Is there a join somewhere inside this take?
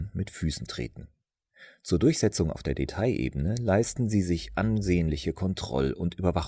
no; 0 cuts

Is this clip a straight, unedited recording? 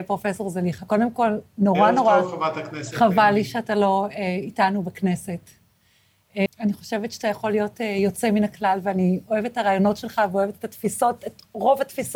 no; 1 cut; at 6.5 s

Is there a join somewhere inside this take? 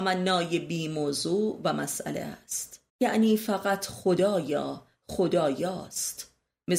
yes; 1 cut; at 2.9 s

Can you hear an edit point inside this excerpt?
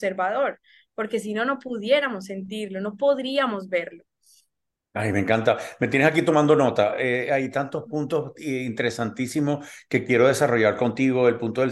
no; 0 cuts

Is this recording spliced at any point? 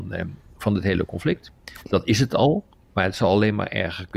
no; 0 cuts

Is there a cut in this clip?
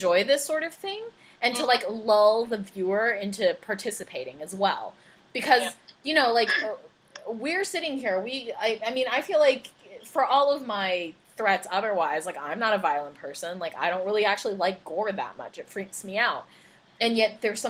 no; 0 cuts

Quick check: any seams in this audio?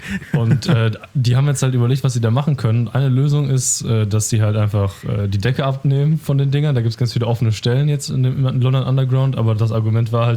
no; 0 cuts

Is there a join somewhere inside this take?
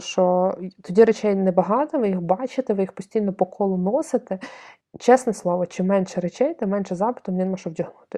no; 0 cuts

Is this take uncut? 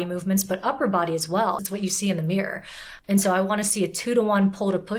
no; 2 cuts; at 1.6 s, 3.0 s

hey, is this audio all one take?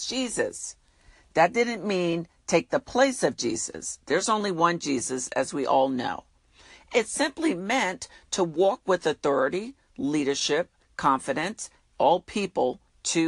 no; 1 cut; at 11.9 s

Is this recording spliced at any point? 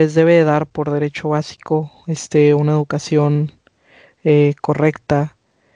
no; 0 cuts

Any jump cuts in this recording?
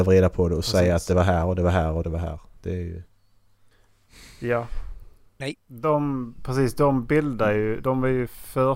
yes; 1 cut; at 5.4 s

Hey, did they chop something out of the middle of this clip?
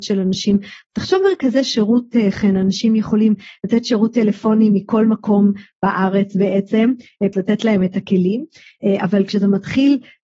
yes; 1 cut; at 7.3 s

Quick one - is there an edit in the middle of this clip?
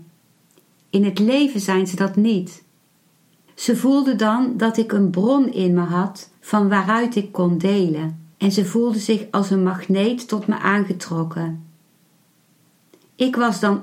yes; 2 cuts; at 3.5 s, 8.3 s

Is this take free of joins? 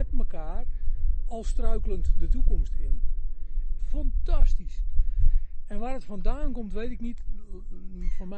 no; 1 cut; at 3.8 s

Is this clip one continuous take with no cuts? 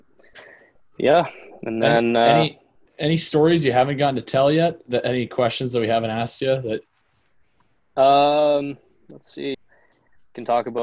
no; 1 cut; at 9.5 s

